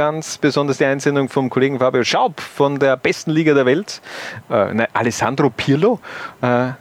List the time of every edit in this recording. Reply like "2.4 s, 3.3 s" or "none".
4.4 s